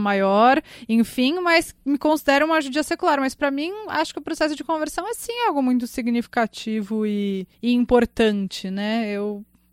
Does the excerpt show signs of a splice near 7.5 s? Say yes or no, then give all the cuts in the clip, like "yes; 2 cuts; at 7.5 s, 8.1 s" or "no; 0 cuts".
yes; 1 cut; at 7.5 s